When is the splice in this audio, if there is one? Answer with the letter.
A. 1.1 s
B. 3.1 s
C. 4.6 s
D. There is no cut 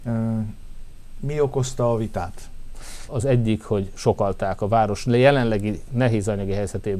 B